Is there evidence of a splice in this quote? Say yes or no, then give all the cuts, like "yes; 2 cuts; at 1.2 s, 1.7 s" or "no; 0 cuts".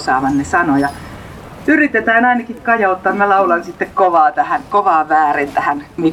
no; 0 cuts